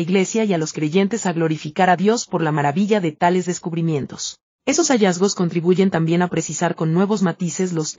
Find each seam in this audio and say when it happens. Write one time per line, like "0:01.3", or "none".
none